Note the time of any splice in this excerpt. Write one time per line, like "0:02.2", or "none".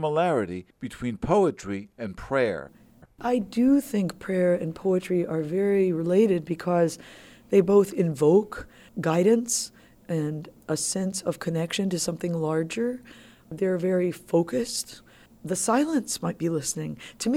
0:15.3